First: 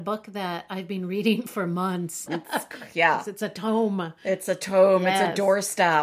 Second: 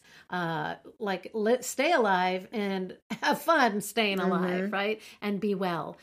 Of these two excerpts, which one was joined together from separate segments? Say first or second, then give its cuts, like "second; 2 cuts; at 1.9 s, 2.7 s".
first; 1 cut; at 2.3 s